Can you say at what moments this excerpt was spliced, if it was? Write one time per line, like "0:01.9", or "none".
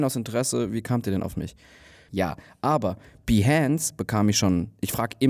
0:02.1

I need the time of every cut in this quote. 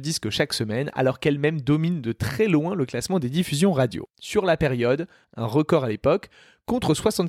0:05.2

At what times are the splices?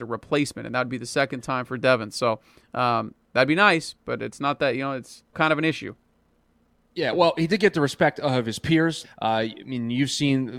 0:05.3
0:09.0

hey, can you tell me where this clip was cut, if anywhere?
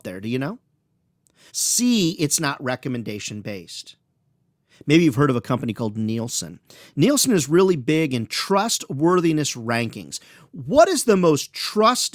0:01.5

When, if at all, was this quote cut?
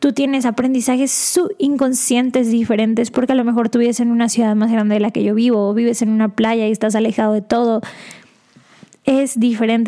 none

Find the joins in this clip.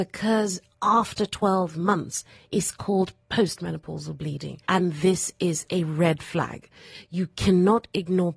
0:04.6

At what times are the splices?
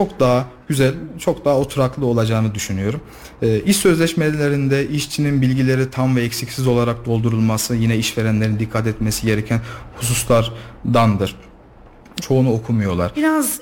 0:12.2

